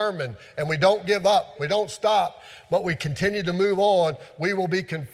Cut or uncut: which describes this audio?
cut